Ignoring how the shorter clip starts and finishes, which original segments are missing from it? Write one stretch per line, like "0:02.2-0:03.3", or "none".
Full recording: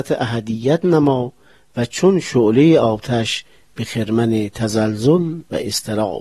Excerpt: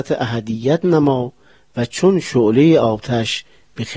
none